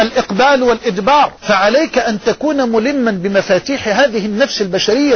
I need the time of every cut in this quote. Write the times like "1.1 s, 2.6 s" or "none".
1.4 s